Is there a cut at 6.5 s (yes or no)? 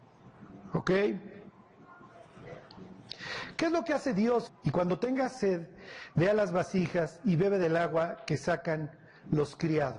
no